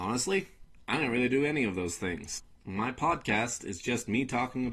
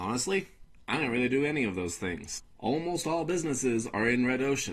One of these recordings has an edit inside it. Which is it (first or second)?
first